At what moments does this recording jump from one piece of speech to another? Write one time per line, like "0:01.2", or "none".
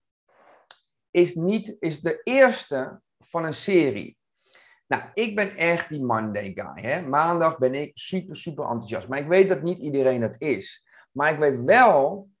0:05.1